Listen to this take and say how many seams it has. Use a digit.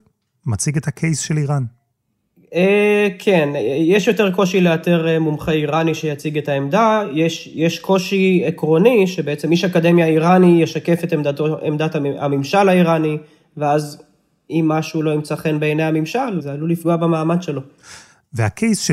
0